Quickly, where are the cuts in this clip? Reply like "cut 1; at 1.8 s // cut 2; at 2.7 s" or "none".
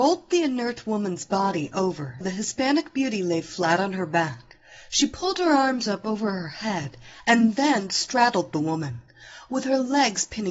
cut 1; at 2.2 s